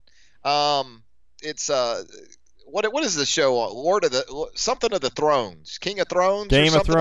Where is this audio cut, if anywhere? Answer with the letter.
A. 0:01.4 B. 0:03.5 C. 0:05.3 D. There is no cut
A